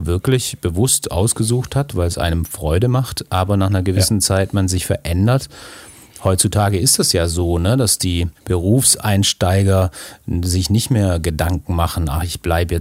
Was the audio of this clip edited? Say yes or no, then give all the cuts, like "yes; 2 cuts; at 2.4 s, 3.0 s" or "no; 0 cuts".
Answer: no; 0 cuts